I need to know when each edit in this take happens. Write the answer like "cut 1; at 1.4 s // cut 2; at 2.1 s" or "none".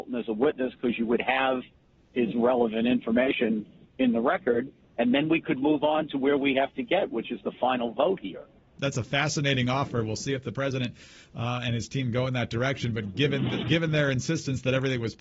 none